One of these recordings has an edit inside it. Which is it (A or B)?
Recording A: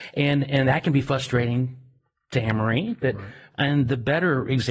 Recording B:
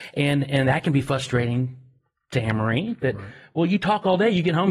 A